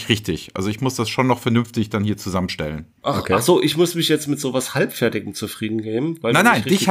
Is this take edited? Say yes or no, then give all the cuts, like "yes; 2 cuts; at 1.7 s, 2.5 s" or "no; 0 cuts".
yes; 1 cut; at 3.0 s